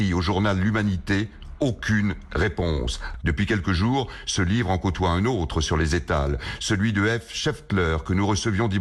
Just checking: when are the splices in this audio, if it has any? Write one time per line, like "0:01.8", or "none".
0:03.2